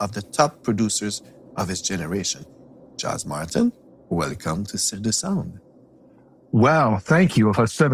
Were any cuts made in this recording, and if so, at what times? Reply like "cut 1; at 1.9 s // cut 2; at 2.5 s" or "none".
none